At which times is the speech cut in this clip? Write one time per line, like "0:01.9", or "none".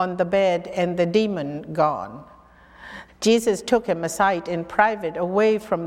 0:03.1